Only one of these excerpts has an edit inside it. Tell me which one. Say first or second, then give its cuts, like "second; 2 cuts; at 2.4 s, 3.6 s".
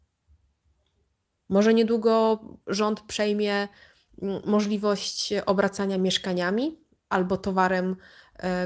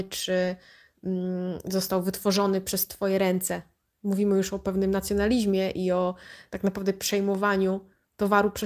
first; 1 cut; at 1.3 s